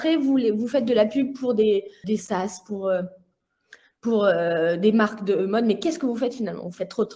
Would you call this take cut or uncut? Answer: cut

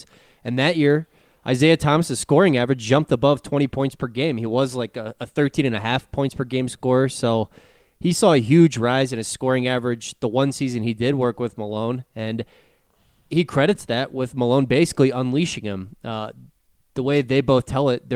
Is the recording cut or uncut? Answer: uncut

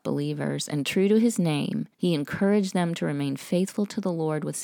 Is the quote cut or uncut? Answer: cut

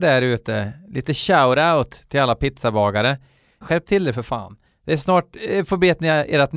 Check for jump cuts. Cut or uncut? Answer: cut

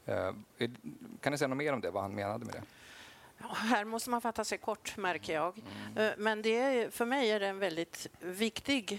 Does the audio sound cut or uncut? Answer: uncut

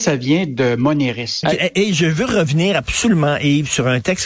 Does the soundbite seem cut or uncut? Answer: cut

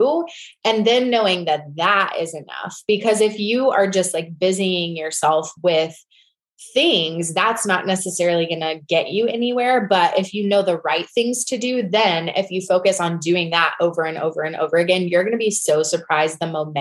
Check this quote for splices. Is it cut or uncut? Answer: uncut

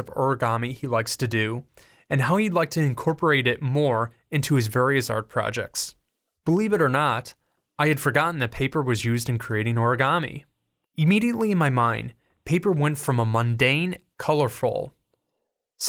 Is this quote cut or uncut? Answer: cut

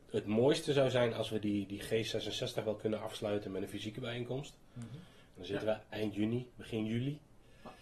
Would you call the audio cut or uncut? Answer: uncut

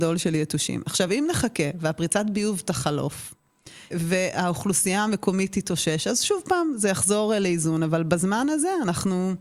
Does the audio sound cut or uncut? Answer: cut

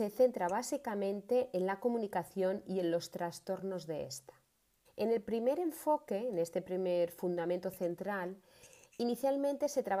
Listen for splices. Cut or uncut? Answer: cut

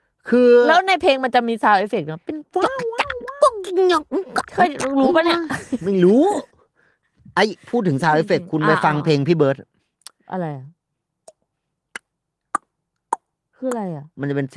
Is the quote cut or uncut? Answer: uncut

